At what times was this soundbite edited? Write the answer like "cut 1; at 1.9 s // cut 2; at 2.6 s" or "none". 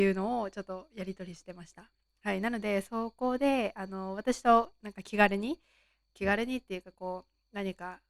none